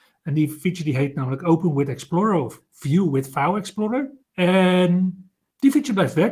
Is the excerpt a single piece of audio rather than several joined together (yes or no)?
no